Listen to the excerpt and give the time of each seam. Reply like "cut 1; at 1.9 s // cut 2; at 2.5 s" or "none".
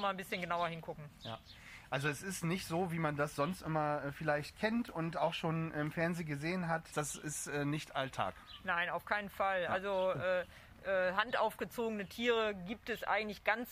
cut 1; at 6.9 s